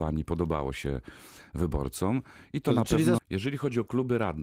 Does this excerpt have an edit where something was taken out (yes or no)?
yes